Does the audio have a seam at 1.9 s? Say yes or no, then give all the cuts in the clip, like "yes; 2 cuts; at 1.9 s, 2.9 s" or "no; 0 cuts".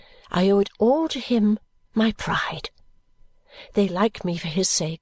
yes; 1 cut; at 1.9 s